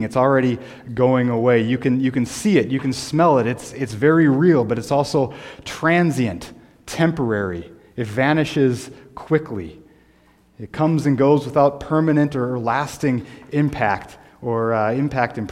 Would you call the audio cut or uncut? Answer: uncut